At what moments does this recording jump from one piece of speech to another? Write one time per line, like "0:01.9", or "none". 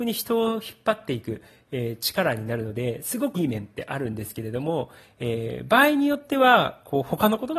0:03.3